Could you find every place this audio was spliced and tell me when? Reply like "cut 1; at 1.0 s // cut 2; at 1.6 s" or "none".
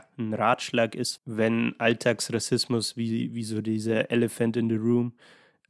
cut 1; at 1.2 s